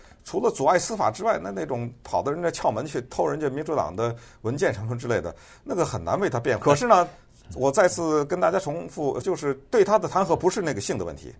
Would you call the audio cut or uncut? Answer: cut